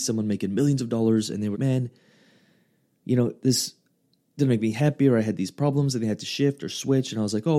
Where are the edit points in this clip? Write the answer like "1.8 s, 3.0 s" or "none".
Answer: 1.5 s